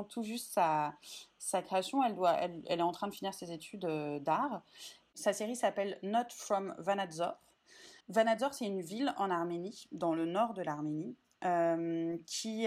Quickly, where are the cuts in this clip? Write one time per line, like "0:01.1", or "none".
0:05.1
0:08.0